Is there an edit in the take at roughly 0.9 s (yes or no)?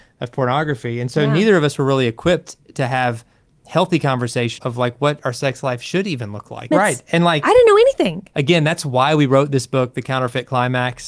no